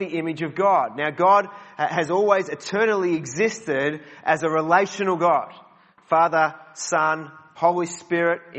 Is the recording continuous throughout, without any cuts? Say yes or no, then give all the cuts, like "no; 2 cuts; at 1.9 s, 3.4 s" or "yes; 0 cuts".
yes; 0 cuts